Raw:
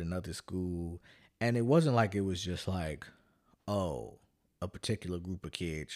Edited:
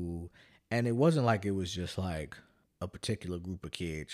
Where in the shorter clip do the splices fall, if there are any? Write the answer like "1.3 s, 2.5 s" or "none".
2.6 s